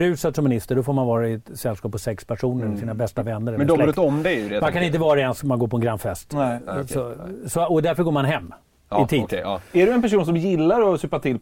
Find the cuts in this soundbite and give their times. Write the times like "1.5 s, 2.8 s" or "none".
none